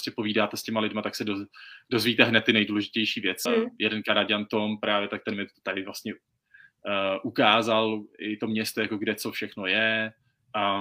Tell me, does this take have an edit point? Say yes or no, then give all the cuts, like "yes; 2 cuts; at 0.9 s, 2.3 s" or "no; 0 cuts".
yes; 1 cut; at 3.5 s